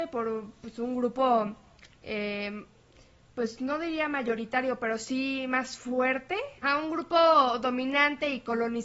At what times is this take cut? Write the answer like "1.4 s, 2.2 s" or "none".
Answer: none